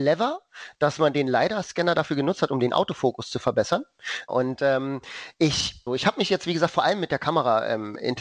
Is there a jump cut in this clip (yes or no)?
yes